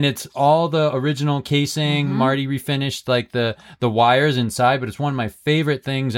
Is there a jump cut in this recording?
no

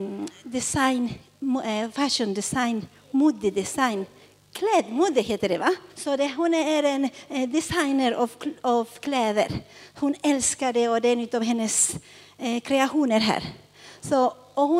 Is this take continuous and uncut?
no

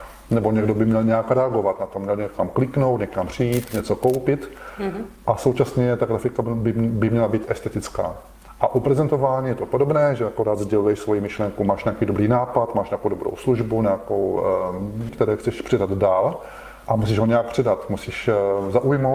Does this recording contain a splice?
yes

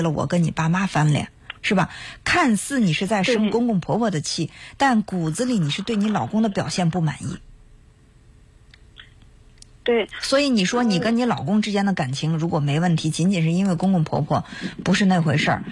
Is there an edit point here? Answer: no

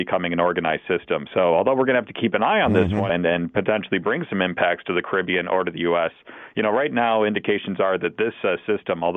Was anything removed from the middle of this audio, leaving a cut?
yes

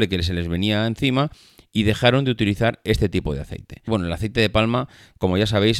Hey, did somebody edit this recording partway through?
yes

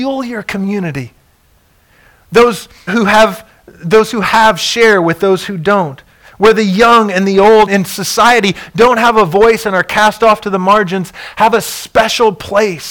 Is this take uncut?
no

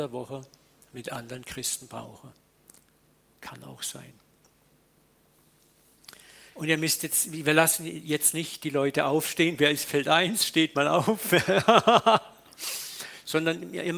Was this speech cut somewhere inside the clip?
yes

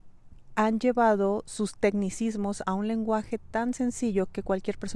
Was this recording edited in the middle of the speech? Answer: no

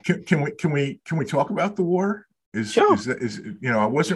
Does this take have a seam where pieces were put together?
no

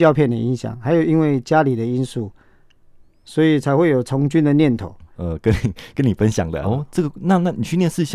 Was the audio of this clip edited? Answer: yes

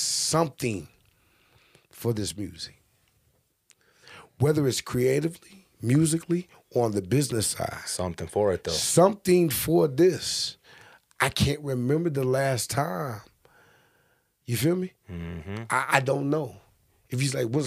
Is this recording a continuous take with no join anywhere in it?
yes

